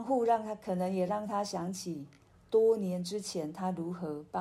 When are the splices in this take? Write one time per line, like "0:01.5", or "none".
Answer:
none